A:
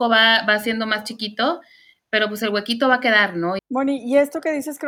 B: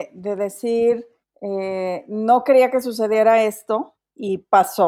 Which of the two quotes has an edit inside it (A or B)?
A